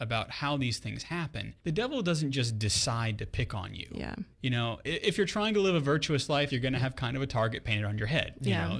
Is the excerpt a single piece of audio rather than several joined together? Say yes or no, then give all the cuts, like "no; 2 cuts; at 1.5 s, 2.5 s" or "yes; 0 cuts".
no; 3 cuts; at 1.6 s, 4.3 s, 6.5 s